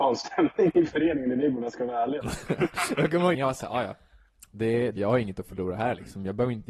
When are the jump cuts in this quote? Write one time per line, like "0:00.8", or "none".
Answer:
0:02.2
0:03.3
0:05.0

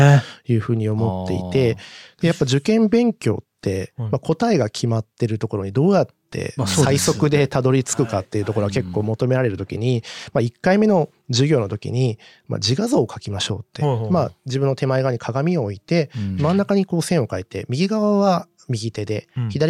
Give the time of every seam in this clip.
none

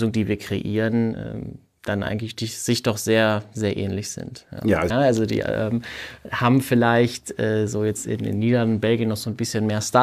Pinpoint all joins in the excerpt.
0:04.9

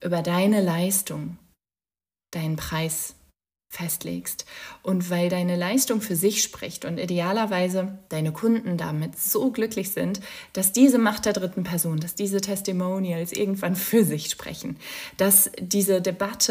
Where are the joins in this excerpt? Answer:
0:08.1

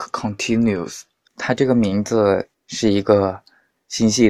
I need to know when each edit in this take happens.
0:01.3
0:02.5

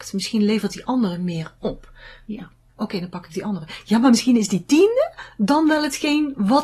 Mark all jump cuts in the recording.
0:02.7

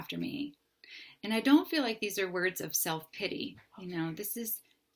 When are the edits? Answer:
none

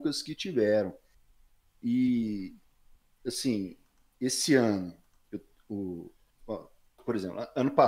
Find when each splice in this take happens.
none

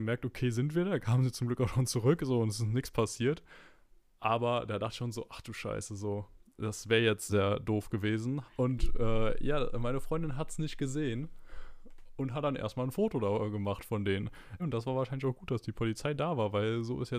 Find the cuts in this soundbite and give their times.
0:07.3
0:08.5
0:14.6

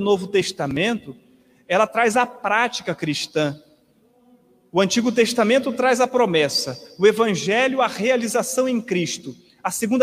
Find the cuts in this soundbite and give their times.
none

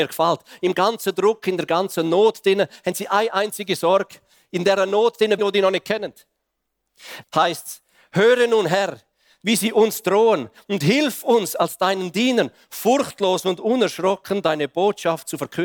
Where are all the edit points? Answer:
0:05.4
0:07.2

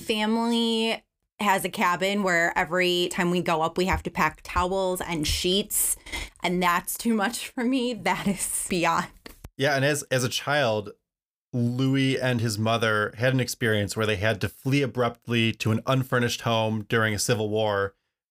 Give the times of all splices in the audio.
none

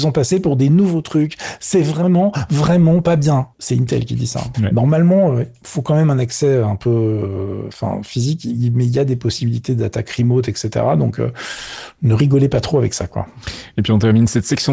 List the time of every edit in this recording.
0:03.5
0:04.5

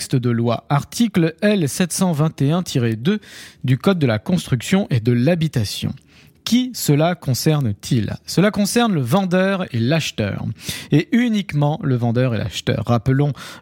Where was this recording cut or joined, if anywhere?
none

